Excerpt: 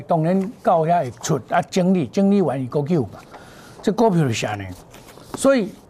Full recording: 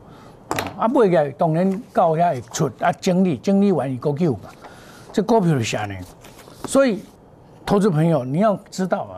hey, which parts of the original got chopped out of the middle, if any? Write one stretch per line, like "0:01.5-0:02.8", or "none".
none